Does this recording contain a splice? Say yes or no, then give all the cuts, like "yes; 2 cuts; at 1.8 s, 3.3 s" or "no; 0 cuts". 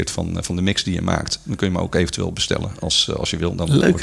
no; 0 cuts